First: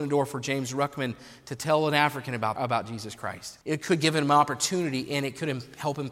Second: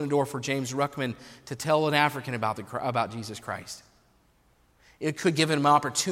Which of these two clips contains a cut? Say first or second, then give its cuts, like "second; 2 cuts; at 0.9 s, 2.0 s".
first; 2 cuts; at 2.6 s, 3.6 s